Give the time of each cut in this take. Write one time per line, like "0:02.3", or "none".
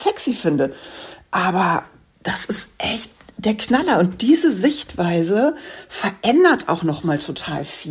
none